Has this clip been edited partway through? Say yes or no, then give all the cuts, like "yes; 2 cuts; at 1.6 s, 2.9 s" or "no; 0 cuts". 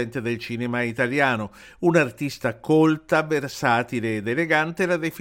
no; 0 cuts